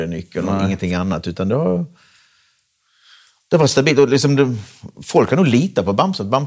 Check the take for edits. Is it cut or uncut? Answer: uncut